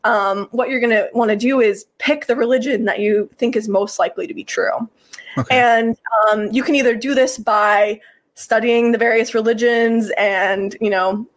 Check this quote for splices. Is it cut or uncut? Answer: uncut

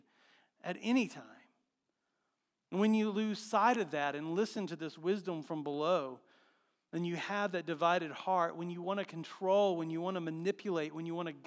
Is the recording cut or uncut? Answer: uncut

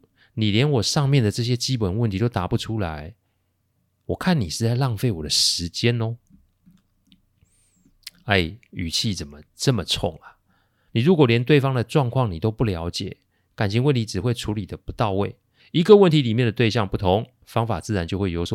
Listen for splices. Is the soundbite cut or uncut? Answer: cut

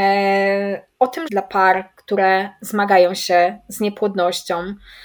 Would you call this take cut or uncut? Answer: cut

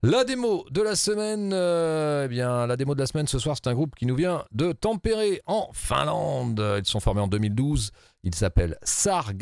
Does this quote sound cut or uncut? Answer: uncut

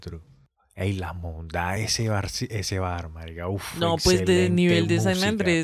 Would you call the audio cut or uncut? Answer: uncut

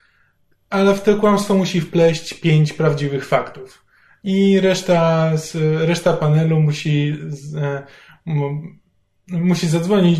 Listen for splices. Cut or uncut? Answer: uncut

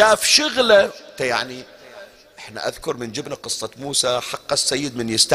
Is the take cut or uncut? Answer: uncut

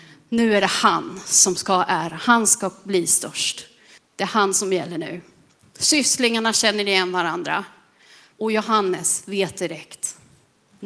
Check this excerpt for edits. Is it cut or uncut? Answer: cut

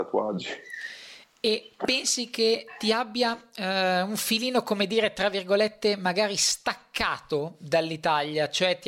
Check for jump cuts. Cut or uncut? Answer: uncut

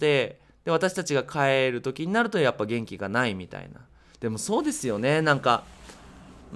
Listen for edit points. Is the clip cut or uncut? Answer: uncut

